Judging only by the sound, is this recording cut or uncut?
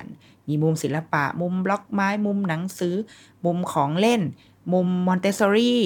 uncut